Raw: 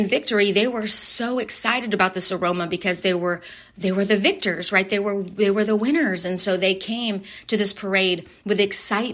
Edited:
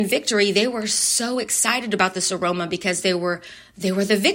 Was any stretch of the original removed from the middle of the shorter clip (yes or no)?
no